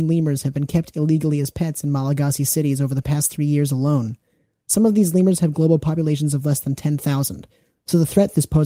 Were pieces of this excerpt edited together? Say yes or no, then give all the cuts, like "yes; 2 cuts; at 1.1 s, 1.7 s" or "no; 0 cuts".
no; 0 cuts